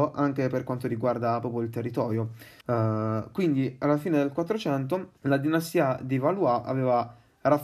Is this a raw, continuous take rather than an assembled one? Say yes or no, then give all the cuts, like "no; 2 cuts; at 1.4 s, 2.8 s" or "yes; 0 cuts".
no; 2 cuts; at 2.6 s, 5.2 s